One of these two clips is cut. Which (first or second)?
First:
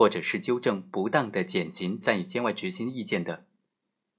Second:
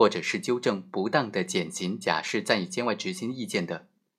first